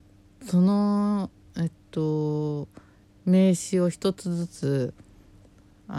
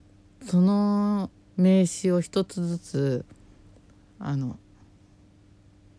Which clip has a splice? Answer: second; 1 cut; at 1.4 s

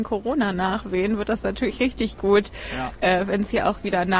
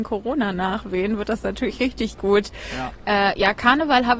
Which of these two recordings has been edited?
second; 1 cut; at 3.0 s

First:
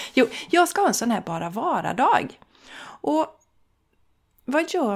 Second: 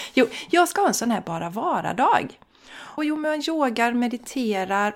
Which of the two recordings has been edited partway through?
second; 1 cut; at 3.0 s

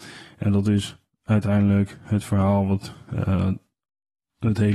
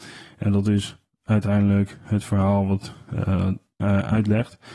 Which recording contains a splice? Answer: second; 1 cut; at 3.8 s

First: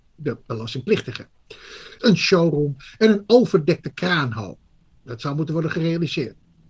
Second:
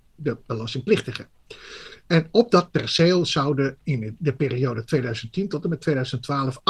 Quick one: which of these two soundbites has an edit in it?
first; 1 cut; at 2.0 s

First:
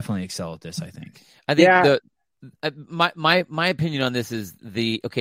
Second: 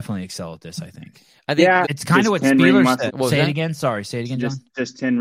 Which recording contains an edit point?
second; 2 cuts; at 1.8 s, 3.1 s

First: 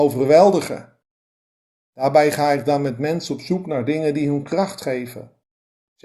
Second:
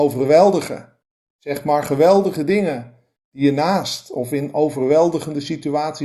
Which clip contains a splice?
second; 1 cut; at 1.3 s

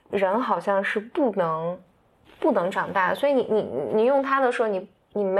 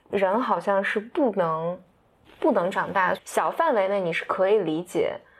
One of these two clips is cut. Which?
second; 1 cut; at 3.1 s

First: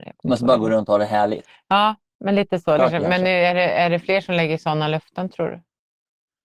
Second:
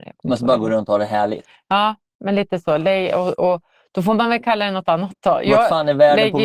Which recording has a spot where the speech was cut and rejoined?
first; 1 cut; at 2.8 s

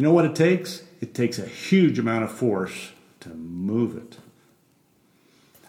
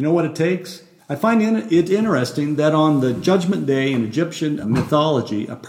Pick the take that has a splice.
second; 2 cuts; at 1.0 s, 4.6 s

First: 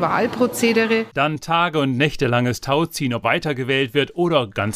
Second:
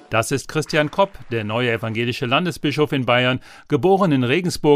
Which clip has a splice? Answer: first; 1 cut; at 3.2 s

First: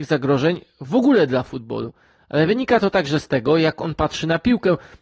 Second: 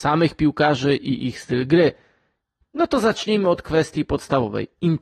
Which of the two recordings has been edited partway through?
second; 1 cut; at 2.6 s

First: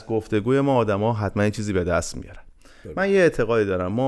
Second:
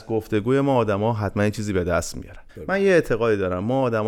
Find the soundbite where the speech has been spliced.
second; 1 cut; at 2.5 s

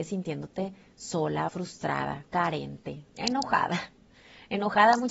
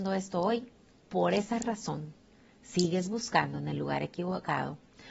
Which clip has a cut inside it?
first; 2 cuts; at 1.5 s, 3.1 s

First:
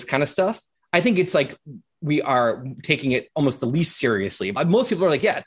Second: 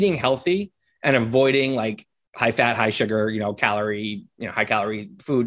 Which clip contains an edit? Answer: first; 1 cut; at 4.6 s

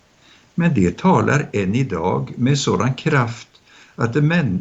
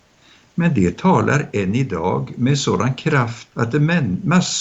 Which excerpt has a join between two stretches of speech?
second; 1 cut; at 3.5 s

